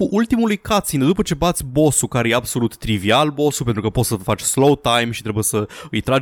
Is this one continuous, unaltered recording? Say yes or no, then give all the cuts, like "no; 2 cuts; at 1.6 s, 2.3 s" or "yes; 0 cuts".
yes; 0 cuts